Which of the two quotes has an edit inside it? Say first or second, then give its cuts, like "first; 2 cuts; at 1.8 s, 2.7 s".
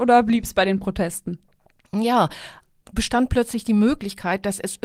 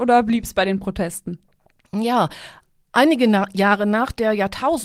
first; 1 cut; at 2.8 s